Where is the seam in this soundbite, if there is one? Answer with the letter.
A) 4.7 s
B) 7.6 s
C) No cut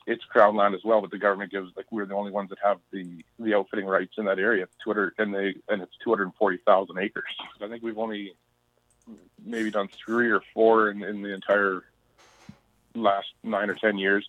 B